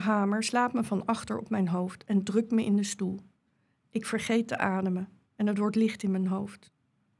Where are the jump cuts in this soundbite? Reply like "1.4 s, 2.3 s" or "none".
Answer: none